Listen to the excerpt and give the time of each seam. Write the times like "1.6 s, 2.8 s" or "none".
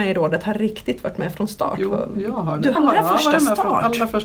2.7 s